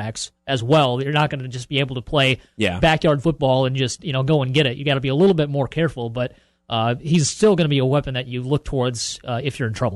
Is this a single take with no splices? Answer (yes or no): yes